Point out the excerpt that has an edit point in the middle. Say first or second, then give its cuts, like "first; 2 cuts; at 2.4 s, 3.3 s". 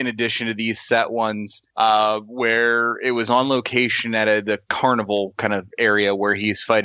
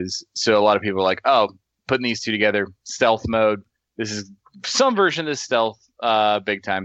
first; 1 cut; at 1.7 s